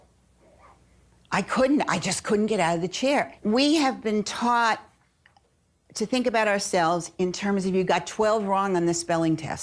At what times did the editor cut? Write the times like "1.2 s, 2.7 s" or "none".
3.4 s

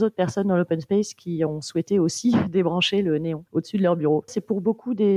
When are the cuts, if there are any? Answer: 4.3 s

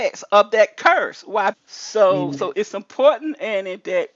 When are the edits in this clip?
1.5 s, 2.5 s

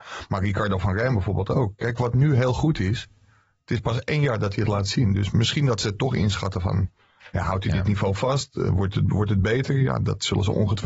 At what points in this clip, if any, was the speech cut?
none

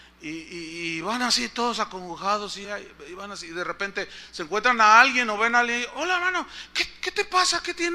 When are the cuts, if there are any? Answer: 2.6 s

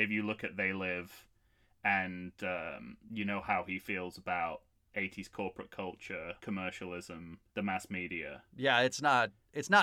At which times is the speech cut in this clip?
6.4 s, 7.5 s

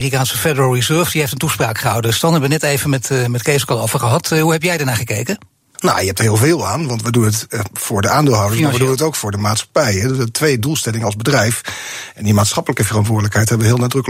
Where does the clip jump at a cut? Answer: 5.7 s

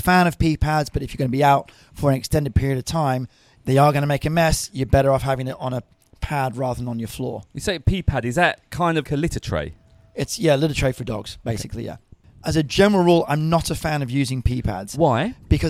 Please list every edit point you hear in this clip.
9.0 s

